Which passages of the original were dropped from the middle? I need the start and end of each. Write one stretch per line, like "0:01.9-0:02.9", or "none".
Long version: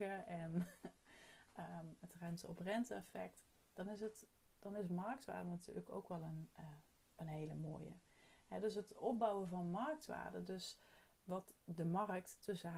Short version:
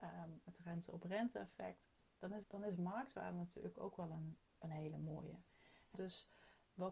0:04.0-0:04.5
0:06.5-0:07.0
0:08.5-0:10.4